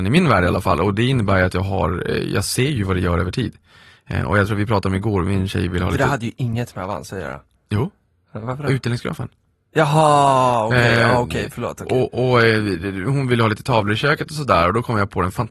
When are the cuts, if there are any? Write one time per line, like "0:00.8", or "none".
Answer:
none